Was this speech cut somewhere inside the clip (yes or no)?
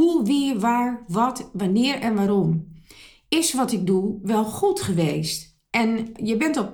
no